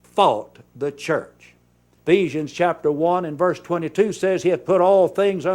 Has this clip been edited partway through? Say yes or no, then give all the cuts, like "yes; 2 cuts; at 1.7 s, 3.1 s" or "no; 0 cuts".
yes; 1 cut; at 2.0 s